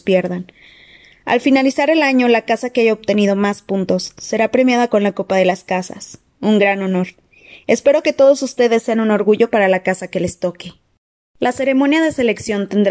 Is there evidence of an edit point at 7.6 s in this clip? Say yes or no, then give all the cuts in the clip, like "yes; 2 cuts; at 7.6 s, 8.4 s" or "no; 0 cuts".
no; 0 cuts